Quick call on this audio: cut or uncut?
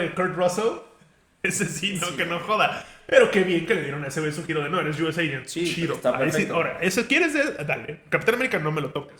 uncut